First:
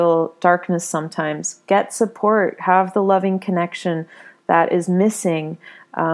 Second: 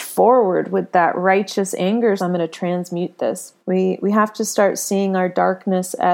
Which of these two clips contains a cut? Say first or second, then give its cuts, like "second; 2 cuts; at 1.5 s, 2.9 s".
second; 2 cuts; at 2.2 s, 3.6 s